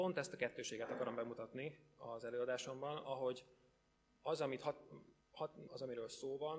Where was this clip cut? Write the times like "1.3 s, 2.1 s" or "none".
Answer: 5.7 s